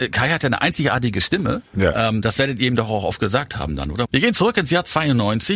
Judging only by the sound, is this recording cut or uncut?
cut